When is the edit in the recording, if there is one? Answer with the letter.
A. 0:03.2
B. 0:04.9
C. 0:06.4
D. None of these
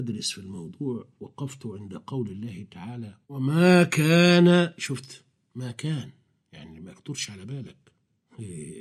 A